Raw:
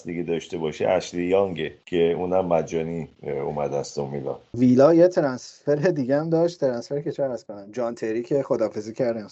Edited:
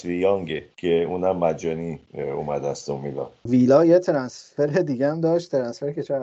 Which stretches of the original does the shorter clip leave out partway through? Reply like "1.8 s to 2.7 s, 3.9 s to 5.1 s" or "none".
none